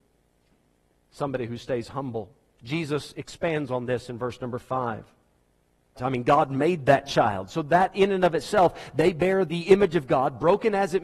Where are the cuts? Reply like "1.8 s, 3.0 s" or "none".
6.0 s